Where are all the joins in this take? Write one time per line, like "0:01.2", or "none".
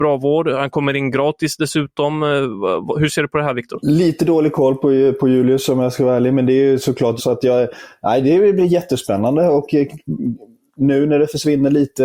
0:07.2